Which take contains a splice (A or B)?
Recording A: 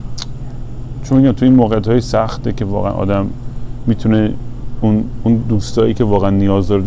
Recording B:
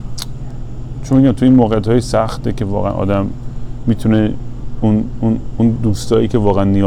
A